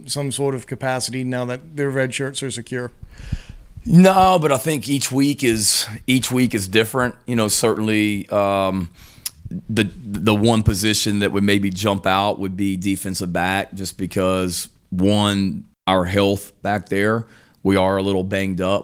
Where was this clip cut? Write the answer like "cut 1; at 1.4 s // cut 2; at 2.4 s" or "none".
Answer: none